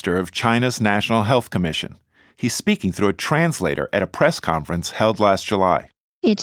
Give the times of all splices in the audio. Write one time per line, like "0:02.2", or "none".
none